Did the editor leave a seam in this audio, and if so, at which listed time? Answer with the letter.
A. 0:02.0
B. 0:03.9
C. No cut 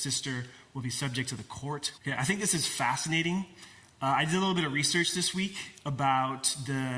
A